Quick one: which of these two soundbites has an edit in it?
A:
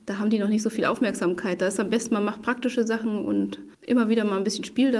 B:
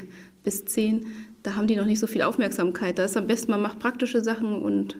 A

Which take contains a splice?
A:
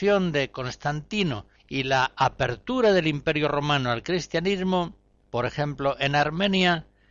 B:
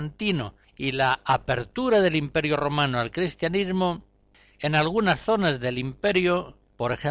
A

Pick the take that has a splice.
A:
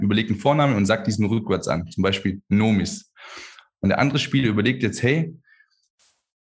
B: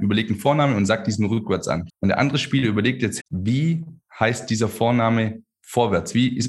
B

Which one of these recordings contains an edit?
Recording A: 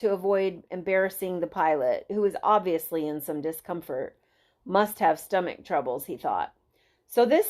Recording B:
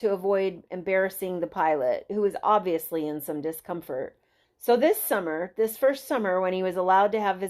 B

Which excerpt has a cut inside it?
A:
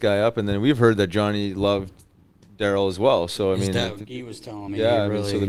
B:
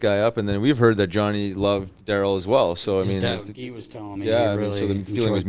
B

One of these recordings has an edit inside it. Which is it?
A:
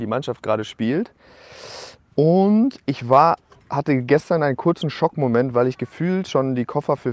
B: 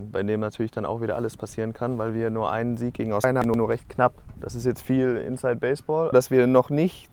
B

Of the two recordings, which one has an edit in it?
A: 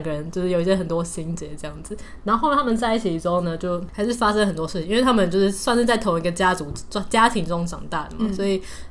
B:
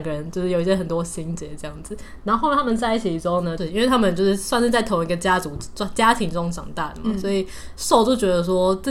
B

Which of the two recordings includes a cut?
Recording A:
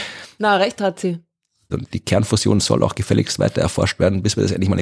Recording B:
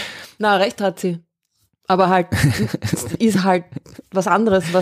A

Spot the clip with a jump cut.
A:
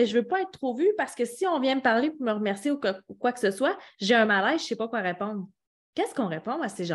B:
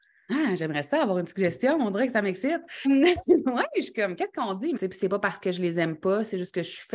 B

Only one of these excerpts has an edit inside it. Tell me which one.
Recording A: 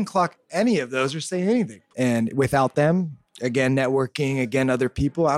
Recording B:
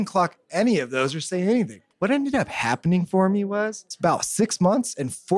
A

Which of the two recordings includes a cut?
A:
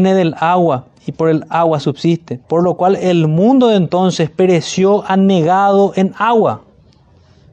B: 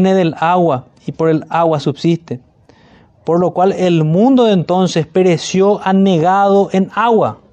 A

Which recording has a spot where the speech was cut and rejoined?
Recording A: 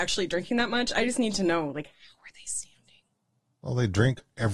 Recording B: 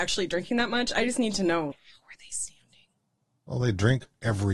B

